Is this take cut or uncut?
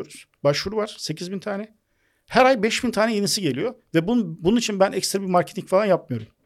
uncut